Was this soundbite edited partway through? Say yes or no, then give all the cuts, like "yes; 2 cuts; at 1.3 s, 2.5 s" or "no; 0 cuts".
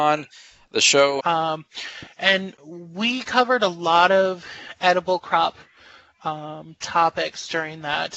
yes; 1 cut; at 1.2 s